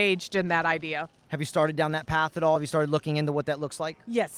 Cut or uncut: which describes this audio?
uncut